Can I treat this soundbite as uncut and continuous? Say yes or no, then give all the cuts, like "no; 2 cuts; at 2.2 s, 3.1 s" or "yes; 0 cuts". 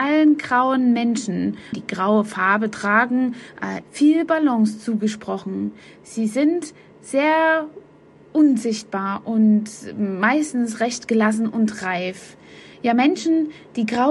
no; 2 cuts; at 1.7 s, 3.8 s